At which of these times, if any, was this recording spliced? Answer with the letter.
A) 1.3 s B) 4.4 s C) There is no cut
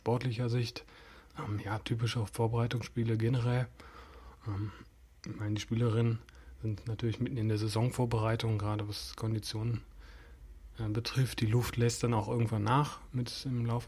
A